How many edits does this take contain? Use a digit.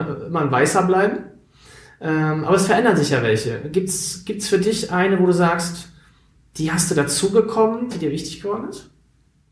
1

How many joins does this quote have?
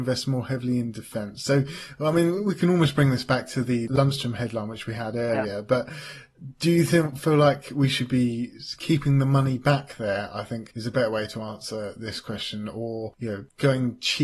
0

